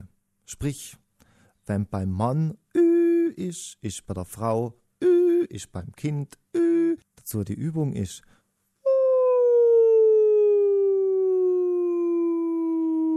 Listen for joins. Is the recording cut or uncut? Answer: cut